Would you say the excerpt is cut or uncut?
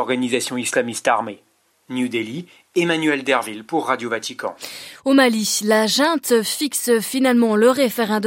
uncut